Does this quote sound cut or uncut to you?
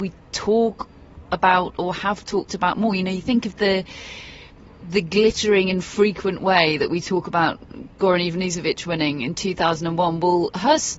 uncut